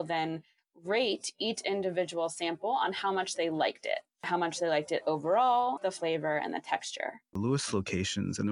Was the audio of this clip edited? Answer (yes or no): yes